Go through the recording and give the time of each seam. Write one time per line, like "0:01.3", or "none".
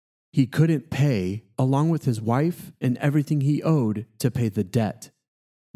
0:01.5
0:02.8